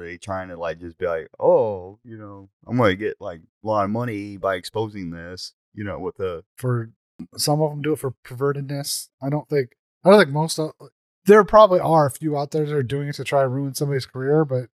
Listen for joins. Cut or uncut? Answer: cut